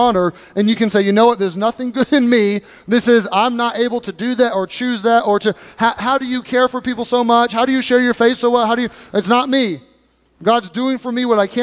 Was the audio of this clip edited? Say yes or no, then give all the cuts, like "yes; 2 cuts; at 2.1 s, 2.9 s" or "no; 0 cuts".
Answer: no; 0 cuts